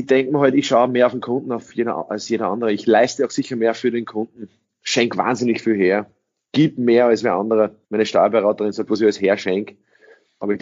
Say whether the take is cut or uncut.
cut